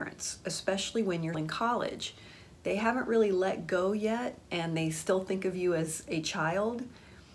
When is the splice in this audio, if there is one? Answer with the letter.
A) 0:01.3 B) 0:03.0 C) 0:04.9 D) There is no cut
A